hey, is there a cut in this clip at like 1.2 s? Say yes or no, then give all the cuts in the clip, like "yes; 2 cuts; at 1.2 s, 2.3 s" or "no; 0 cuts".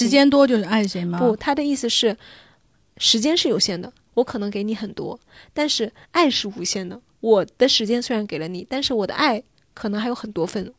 no; 0 cuts